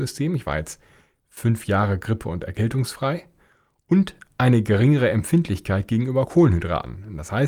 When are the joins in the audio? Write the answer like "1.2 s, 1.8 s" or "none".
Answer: none